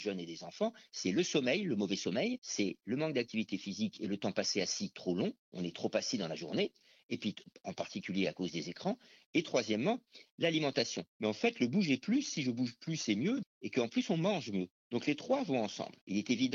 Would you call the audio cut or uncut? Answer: cut